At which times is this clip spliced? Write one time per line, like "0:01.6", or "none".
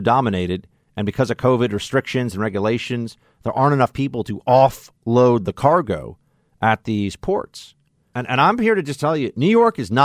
0:08.1